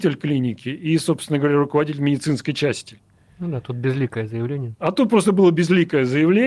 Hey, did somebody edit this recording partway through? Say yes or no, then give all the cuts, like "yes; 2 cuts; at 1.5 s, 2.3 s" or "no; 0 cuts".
no; 0 cuts